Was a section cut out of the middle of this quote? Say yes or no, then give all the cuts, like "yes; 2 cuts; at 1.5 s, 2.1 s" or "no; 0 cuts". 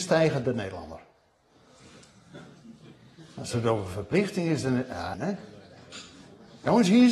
yes; 1 cut; at 5.1 s